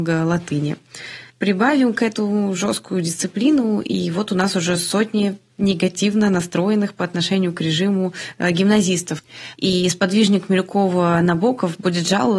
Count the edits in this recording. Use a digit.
2